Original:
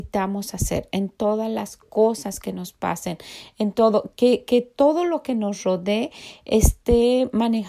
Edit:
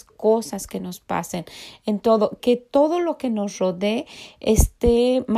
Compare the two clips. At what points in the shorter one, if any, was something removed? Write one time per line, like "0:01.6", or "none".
0:02.4